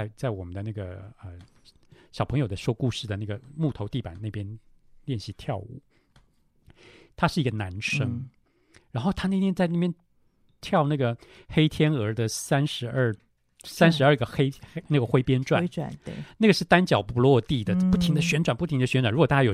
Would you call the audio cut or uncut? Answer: uncut